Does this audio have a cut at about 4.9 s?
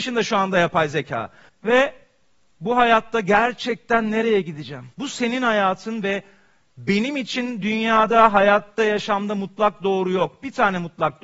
yes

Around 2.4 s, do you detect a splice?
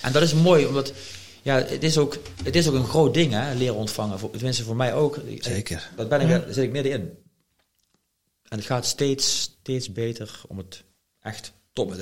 no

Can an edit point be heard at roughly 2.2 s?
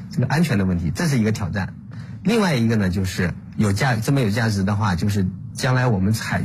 no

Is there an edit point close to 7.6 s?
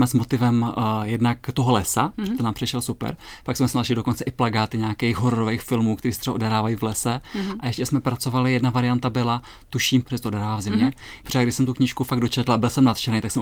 no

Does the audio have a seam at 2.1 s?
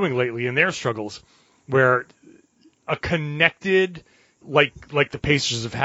no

